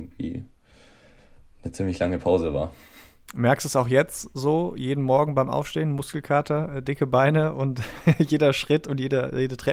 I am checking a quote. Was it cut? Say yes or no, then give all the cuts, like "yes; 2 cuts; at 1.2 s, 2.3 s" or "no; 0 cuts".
no; 0 cuts